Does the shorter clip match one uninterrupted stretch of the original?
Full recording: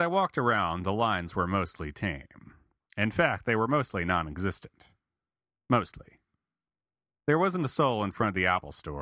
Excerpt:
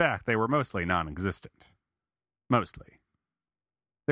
yes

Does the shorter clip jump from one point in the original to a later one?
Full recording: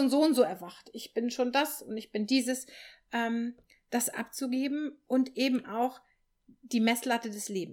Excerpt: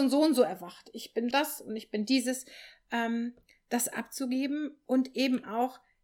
yes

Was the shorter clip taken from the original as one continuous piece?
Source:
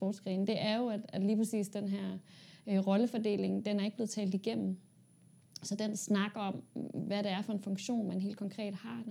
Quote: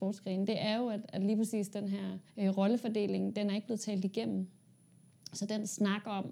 no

